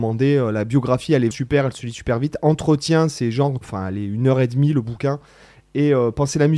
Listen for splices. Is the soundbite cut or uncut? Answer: cut